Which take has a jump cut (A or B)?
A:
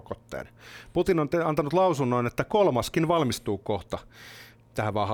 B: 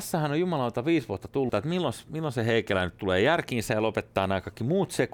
B